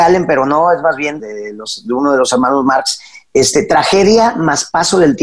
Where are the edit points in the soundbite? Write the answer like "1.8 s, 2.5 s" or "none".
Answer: 1.2 s